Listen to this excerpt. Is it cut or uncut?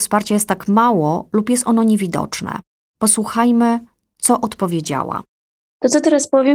uncut